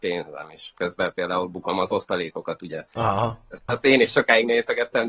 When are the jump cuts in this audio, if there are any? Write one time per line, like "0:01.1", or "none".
0:03.7